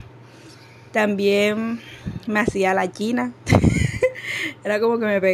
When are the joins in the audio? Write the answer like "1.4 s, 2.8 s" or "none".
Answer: none